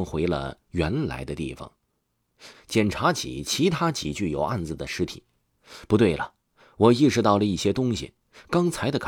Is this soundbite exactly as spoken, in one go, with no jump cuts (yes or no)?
no